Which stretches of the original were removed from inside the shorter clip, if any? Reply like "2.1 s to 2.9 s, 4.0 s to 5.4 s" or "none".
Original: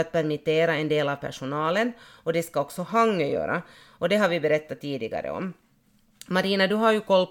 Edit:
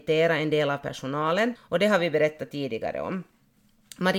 1.9 s to 3.8 s